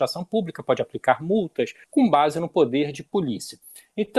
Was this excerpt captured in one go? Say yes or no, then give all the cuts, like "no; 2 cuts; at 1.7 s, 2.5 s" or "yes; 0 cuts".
no; 1 cut; at 1.8 s